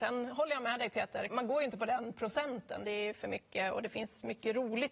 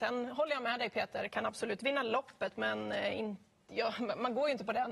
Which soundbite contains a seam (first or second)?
first